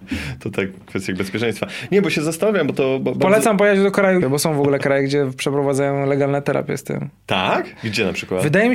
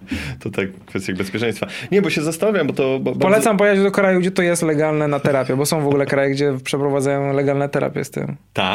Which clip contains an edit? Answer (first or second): first